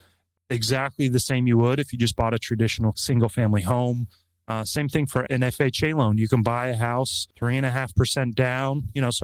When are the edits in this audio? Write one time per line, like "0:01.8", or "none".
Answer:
0:07.3